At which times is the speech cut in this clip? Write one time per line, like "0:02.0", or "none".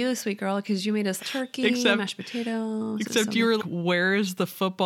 0:01.2
0:03.6